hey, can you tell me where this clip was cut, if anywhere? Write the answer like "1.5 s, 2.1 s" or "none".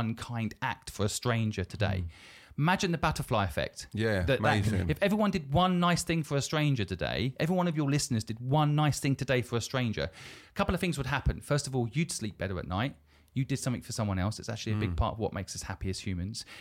none

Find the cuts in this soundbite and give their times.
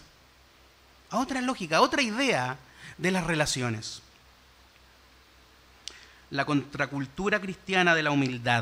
none

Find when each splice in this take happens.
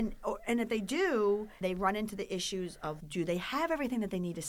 1.6 s, 3.0 s

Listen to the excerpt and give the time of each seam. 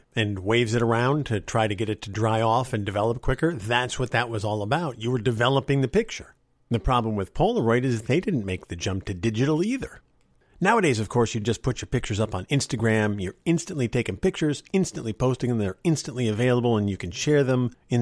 none

